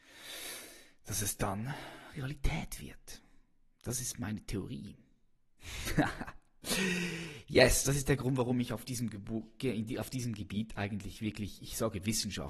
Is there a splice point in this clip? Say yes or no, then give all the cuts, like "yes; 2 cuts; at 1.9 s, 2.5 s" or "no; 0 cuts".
no; 0 cuts